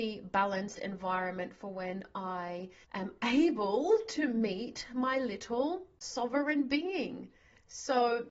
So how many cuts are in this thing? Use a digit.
0